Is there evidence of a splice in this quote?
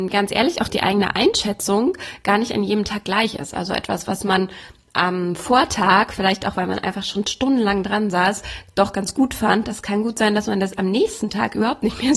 no; 0 cuts

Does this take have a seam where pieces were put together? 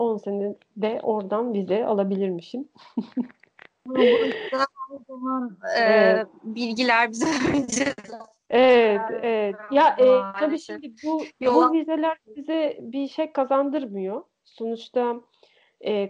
no; 0 cuts

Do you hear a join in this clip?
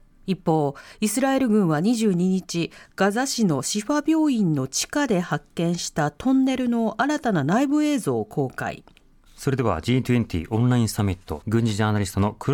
yes; 2 cuts; at 9.3 s, 11.4 s

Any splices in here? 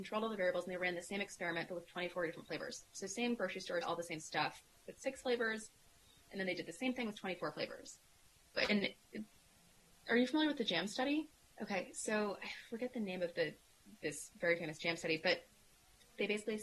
yes; 3 cuts; at 3.8 s, 8.6 s, 11.5 s

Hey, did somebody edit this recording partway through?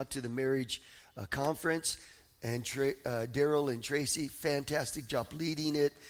no; 0 cuts

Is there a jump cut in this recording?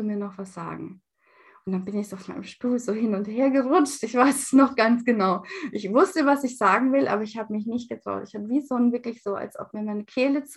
no; 0 cuts

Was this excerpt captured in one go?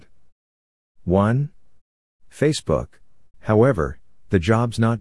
no; 1 cut; at 3.3 s

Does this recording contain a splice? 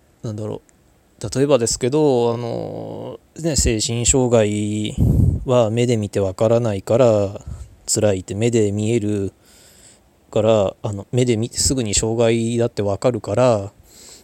no; 0 cuts

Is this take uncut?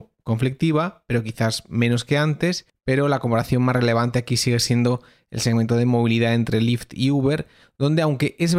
yes; 0 cuts

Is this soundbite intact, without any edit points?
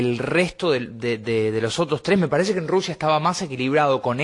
yes; 0 cuts

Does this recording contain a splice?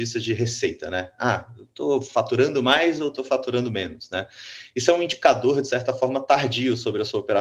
no; 0 cuts

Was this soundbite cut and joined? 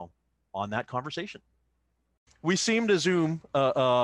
no; 0 cuts

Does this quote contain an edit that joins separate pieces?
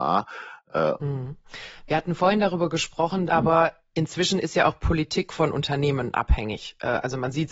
yes; 2 cuts; at 1.0 s, 3.3 s

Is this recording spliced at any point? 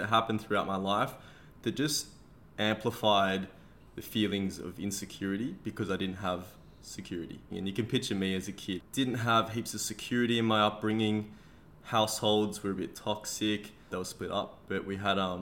yes; 3 cuts; at 7.5 s, 8.8 s, 13.9 s

